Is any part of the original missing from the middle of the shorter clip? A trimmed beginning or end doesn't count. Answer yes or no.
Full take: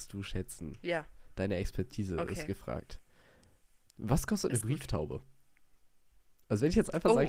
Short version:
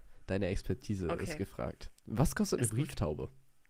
yes